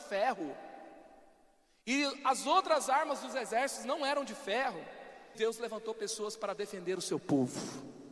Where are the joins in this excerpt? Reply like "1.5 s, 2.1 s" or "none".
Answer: 5.3 s